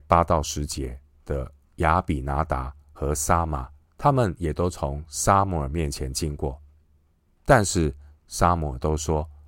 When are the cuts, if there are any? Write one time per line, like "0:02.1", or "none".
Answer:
0:03.9